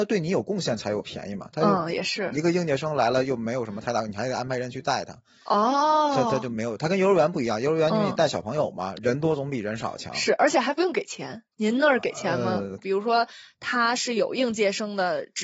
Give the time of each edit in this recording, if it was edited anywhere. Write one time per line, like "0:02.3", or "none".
0:08.9
0:12.8